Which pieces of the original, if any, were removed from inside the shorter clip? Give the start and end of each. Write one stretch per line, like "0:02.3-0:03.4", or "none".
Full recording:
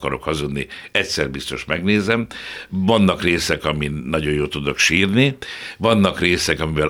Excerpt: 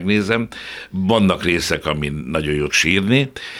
0:04.5-0:04.8